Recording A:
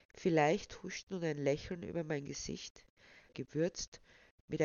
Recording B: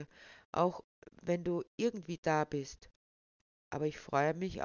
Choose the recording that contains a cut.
A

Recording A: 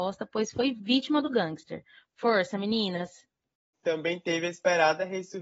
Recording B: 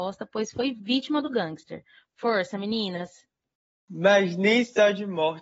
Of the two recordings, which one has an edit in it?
A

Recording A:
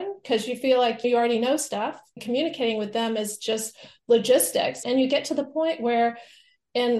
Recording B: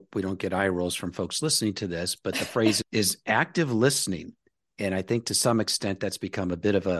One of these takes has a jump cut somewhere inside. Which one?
A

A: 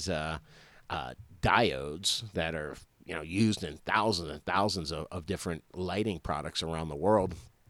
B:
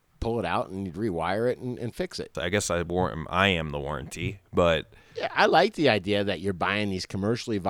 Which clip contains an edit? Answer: B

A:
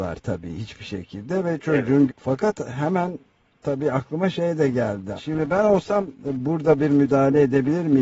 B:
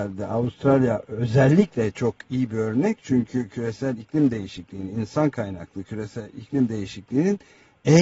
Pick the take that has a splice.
A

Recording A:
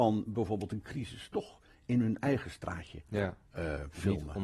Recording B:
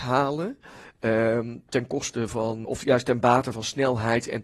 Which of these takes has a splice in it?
B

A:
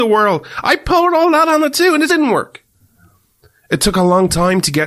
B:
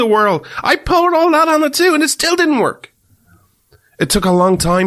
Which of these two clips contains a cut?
A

